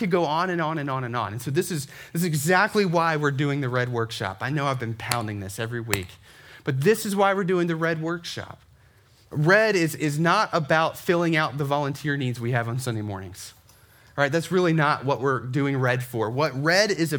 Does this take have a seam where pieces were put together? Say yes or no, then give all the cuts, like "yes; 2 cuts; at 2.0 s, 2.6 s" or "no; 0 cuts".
no; 0 cuts